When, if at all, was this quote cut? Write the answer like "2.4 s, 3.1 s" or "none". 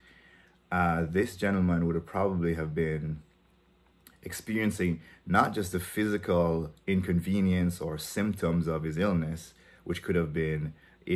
none